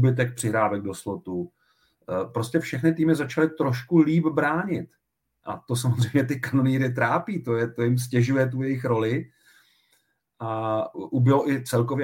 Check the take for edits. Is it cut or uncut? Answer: uncut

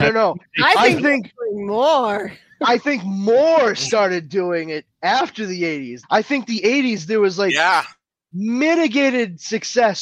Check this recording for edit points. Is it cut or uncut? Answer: cut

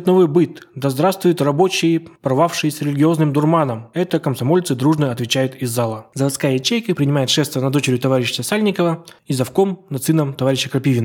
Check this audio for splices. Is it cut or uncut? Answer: uncut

